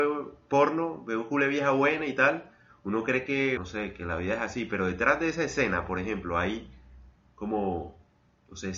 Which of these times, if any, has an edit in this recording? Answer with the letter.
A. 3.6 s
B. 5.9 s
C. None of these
A